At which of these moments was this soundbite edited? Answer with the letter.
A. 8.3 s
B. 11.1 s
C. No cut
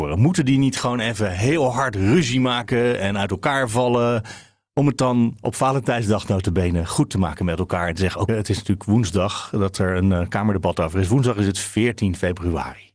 A